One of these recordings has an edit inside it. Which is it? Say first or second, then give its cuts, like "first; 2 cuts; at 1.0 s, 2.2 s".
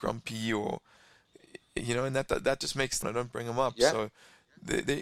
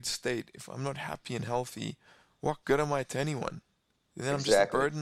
first; 1 cut; at 3.0 s